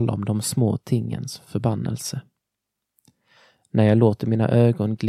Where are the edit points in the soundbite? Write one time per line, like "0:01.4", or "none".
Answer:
none